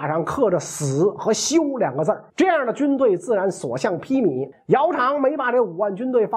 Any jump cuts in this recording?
yes; 2 cuts; at 2.3 s, 4.5 s

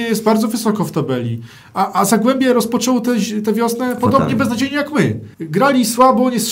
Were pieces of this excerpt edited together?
yes; 1 cut; at 5.3 s

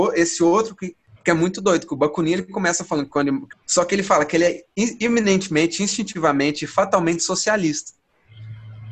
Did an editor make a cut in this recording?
yes; 2 cuts; at 1.2 s, 3.5 s

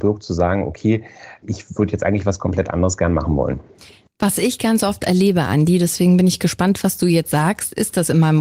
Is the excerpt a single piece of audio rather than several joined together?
yes; 0 cuts

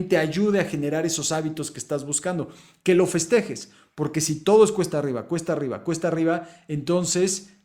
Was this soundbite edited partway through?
no; 0 cuts

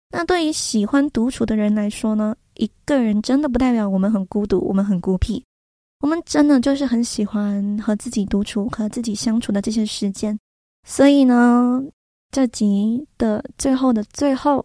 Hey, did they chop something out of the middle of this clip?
yes; 1 cut; at 10.7 s

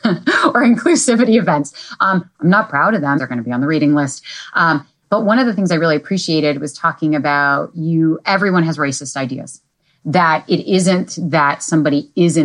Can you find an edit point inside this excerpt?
yes; 1 cut; at 3.2 s

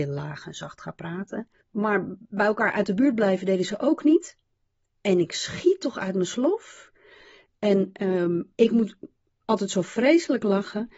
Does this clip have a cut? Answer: yes; 2 cuts; at 1.6 s, 7.5 s

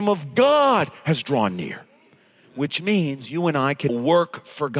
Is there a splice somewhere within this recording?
yes; 1 cut; at 3.9 s

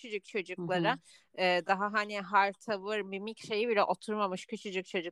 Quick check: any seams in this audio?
no; 0 cuts

